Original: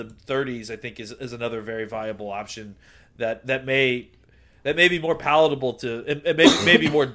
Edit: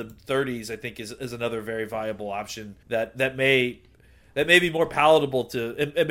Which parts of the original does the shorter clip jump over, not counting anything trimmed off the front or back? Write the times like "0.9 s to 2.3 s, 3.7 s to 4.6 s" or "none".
2.8 s to 3.1 s